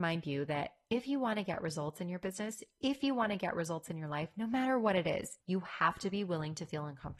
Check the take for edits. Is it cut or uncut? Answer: cut